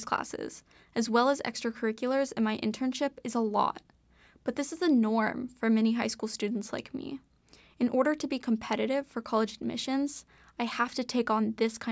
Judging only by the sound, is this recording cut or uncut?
uncut